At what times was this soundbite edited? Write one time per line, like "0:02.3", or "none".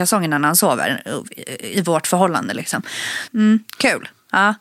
0:03.3